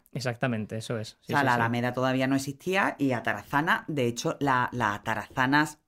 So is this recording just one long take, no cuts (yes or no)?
yes